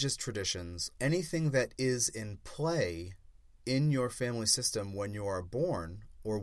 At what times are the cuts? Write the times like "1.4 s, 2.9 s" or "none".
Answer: 1.0 s